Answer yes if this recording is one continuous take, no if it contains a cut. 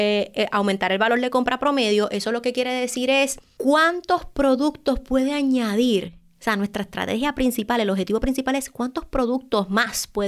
yes